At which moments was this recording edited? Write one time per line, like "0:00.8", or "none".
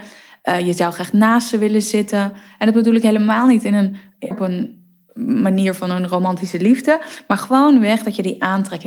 0:04.3